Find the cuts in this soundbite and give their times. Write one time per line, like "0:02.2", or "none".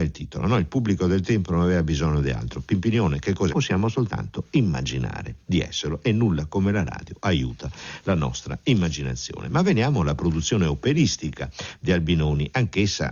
0:03.5